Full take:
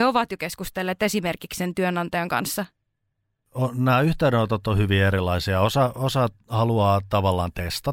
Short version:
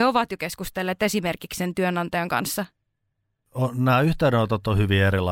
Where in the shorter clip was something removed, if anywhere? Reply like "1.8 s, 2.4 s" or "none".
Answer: none